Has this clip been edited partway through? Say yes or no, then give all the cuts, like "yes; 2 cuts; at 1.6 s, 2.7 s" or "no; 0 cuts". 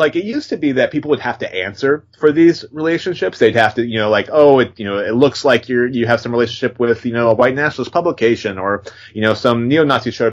no; 0 cuts